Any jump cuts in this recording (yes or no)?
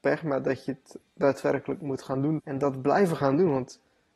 yes